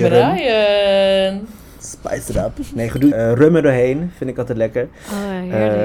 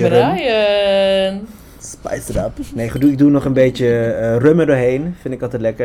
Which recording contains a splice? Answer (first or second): first